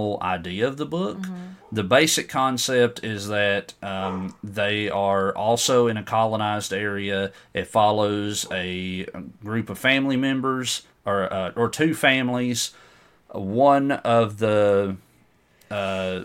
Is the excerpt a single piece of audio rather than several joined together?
yes; 0 cuts

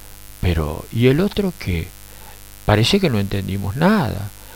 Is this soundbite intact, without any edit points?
yes; 0 cuts

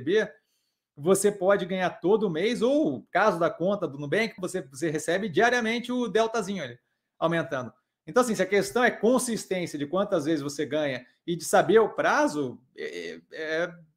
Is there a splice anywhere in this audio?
yes; 1 cut; at 4.4 s

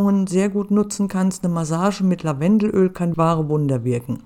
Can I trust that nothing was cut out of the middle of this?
no; 1 cut; at 3.1 s

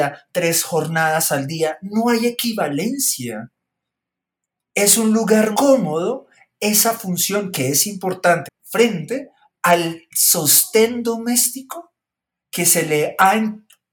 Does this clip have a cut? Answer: yes; 2 cuts; at 5.5 s, 8.4 s

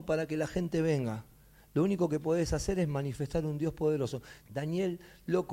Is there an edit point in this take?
yes; 1 cut; at 4.4 s

